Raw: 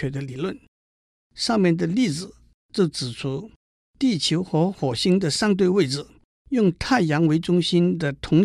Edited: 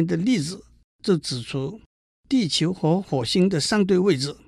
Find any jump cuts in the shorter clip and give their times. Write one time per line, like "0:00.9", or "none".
none